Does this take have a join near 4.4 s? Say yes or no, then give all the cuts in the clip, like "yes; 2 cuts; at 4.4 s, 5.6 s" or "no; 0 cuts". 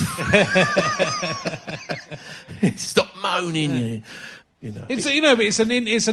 yes; 1 cut; at 4.4 s